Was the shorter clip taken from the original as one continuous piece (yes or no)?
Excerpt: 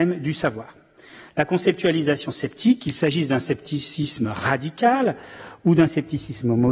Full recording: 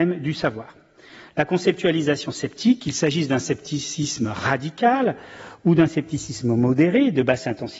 yes